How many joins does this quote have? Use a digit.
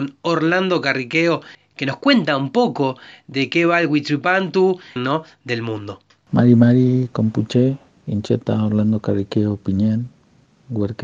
1